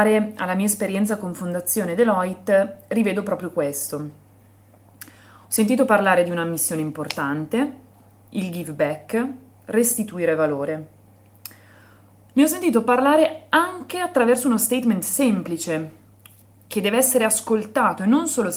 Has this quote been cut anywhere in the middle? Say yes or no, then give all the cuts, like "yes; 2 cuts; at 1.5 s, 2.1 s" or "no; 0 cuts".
no; 0 cuts